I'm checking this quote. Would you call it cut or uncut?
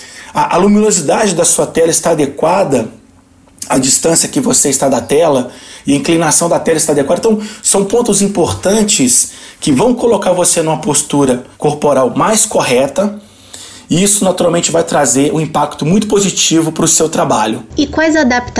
cut